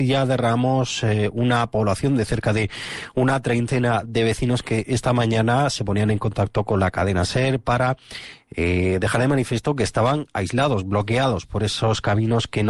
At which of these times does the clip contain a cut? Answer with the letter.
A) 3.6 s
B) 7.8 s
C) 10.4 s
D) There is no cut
D